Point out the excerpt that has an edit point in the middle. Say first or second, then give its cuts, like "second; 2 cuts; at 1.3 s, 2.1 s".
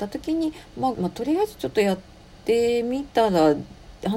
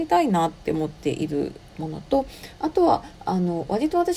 first; 1 cut; at 0.9 s